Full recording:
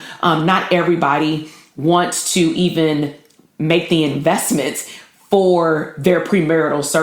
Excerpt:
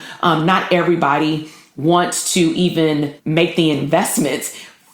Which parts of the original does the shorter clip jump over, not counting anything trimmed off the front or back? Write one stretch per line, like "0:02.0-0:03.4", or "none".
0:03.2-0:03.5